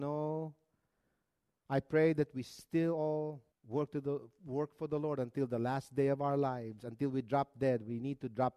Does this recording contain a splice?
yes; 1 cut; at 3.5 s

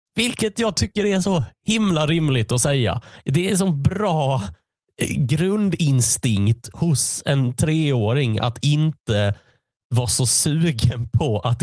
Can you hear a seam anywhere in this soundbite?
no; 0 cuts

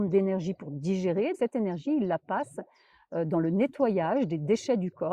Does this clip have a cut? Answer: yes; 1 cut; at 1.3 s

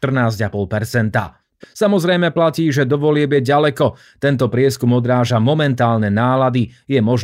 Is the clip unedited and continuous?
no; 1 cut; at 1.6 s

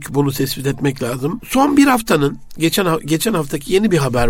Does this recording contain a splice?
yes; 1 cut; at 1.4 s

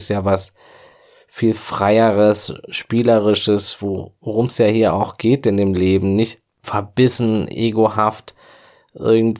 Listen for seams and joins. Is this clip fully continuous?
yes; 0 cuts

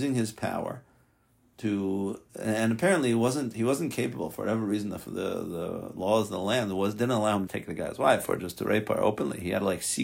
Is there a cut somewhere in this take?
yes; 2 cuts; at 2.3 s, 7.5 s

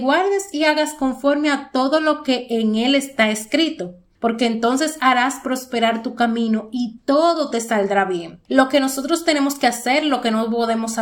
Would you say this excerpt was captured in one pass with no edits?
no; 1 cut; at 8.5 s

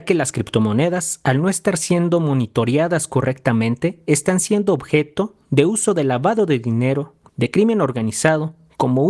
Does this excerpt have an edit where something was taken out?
yes; 1 cut; at 7.3 s

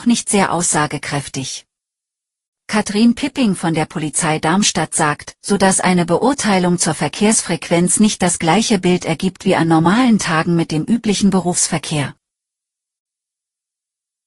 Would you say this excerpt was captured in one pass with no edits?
no; 1 cut; at 5.4 s

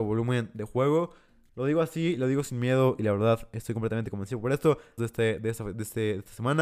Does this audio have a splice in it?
yes; 2 cuts; at 1.5 s, 5.0 s

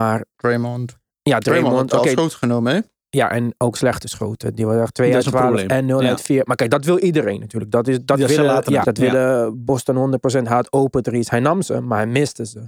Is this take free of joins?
no; 1 cut; at 8.8 s

